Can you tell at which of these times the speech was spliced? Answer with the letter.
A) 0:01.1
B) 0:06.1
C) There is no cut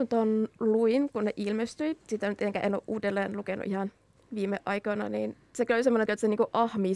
B